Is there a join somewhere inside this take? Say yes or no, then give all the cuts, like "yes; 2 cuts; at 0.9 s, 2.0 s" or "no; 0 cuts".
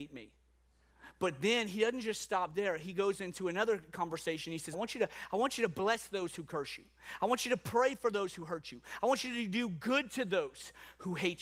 yes; 1 cut; at 4.7 s